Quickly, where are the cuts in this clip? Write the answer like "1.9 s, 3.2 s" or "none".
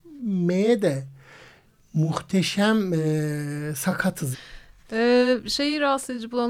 4.3 s